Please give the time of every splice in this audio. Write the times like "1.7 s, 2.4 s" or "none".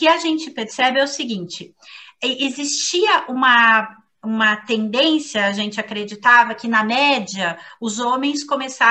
none